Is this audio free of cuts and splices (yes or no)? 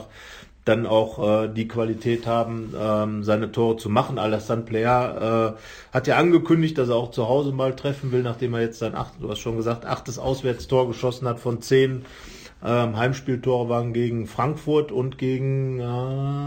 yes